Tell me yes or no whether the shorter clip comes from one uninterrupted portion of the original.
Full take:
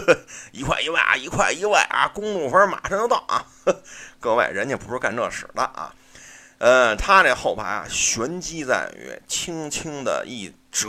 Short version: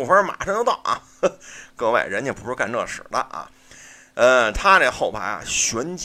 yes